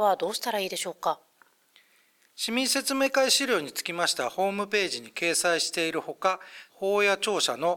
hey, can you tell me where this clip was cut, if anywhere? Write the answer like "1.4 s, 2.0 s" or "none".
6.7 s